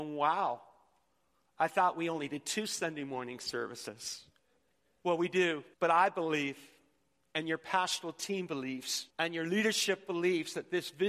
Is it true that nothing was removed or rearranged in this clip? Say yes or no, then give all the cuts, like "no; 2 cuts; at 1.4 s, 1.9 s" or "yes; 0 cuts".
no; 2 cuts; at 5.7 s, 9.1 s